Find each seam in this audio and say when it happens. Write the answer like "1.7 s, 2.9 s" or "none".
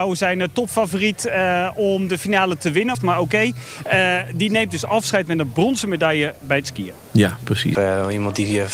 2.9 s, 7.7 s